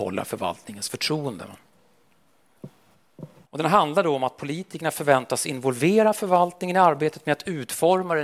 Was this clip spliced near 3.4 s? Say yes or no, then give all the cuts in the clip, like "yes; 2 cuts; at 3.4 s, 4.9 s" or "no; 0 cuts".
yes; 1 cut; at 3.4 s